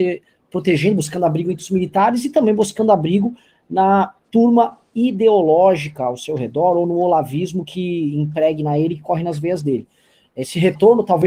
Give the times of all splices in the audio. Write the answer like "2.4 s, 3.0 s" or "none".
none